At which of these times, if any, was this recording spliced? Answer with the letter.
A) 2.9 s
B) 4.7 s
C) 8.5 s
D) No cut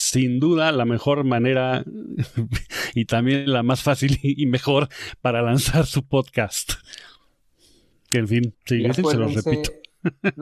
C